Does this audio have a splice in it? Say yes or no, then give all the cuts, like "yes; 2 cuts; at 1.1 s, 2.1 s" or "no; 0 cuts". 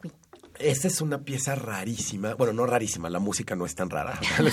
no; 0 cuts